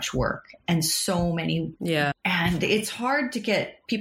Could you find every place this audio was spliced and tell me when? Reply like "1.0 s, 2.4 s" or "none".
2.1 s